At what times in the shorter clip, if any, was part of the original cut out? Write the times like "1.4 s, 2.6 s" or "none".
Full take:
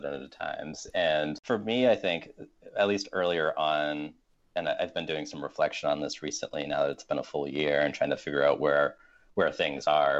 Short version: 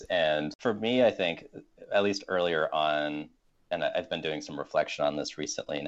none